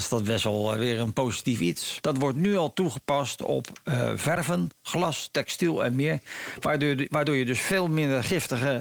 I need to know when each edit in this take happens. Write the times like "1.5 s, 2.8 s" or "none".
2.0 s